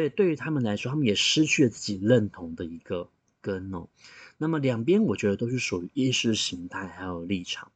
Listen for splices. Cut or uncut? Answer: uncut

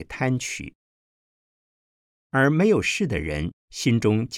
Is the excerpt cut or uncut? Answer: uncut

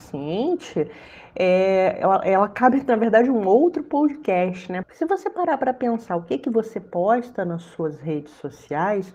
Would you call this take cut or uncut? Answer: cut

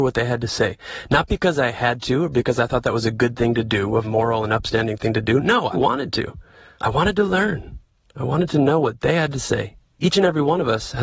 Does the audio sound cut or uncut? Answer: cut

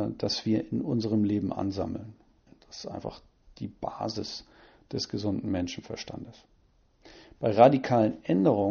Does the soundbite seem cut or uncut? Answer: uncut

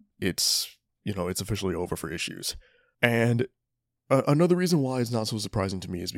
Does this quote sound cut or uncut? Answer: cut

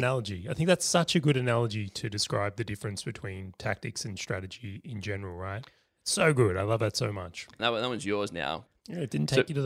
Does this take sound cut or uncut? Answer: cut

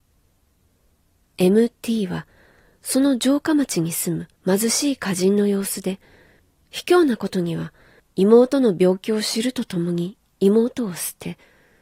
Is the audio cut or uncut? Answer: cut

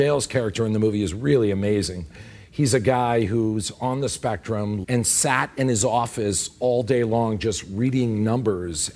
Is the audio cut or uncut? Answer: cut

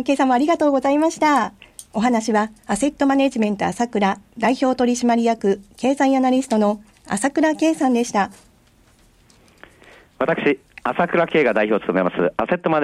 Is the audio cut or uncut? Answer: uncut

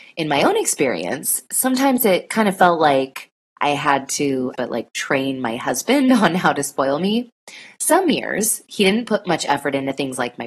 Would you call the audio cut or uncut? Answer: cut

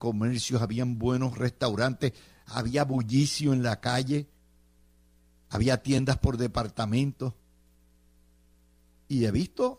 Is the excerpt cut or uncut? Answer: uncut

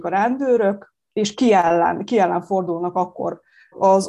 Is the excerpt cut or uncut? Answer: uncut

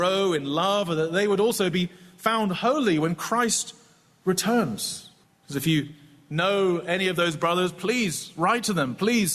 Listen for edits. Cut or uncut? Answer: cut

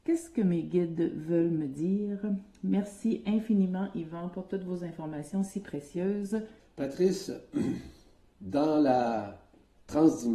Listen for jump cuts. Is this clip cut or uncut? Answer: cut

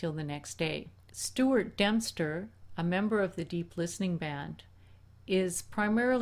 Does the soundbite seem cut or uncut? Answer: cut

